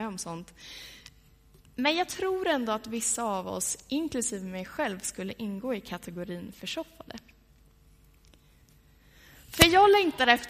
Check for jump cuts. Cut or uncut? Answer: uncut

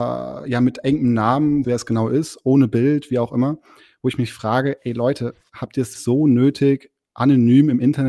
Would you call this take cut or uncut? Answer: cut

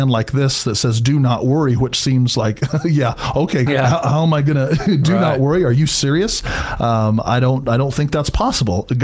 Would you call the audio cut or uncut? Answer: cut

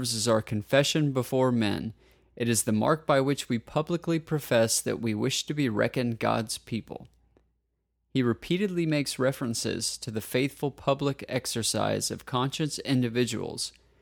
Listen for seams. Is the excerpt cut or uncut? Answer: uncut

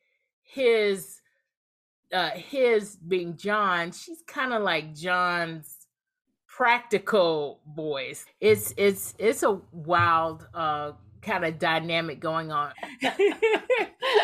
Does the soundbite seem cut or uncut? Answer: cut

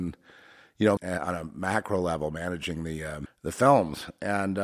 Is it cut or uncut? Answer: cut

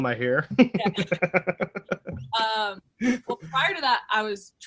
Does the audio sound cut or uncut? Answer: uncut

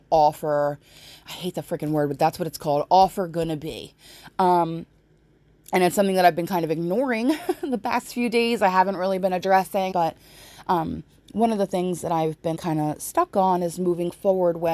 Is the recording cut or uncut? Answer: cut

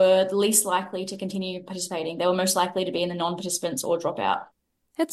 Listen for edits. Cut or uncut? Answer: uncut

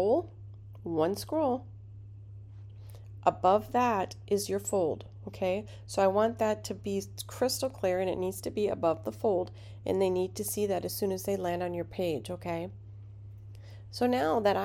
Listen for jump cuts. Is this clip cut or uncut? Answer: uncut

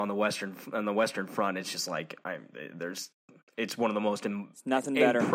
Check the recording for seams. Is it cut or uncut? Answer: uncut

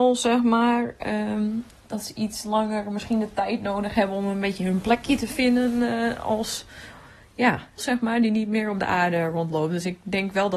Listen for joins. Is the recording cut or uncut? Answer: cut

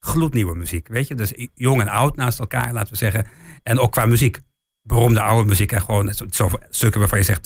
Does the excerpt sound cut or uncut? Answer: uncut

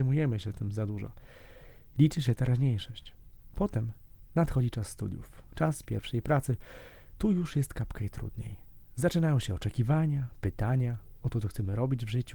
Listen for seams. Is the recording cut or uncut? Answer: uncut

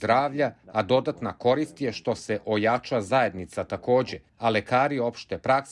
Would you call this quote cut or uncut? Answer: cut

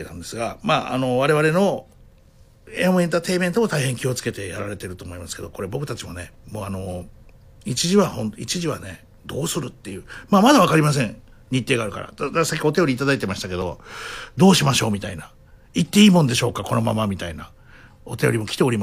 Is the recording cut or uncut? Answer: uncut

